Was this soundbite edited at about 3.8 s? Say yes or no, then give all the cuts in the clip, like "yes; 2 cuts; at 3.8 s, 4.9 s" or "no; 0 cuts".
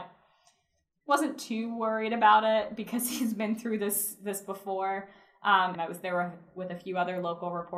no; 1 cut; at 5.8 s